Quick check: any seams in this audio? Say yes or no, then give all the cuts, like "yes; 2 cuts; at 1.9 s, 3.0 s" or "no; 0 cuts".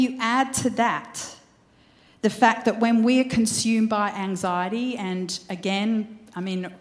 no; 0 cuts